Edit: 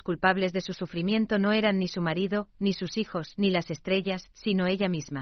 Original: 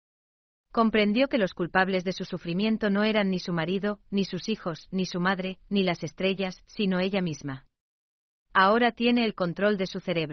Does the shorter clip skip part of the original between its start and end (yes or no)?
yes